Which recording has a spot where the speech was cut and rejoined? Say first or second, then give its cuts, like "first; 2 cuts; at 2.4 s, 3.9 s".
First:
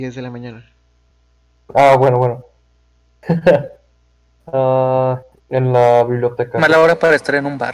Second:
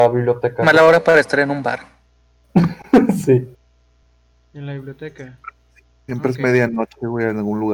first; 1 cut; at 5.3 s